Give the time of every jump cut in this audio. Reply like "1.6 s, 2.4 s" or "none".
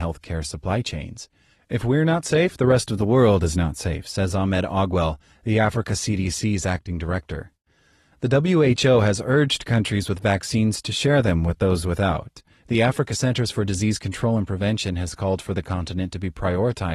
1.5 s, 12.6 s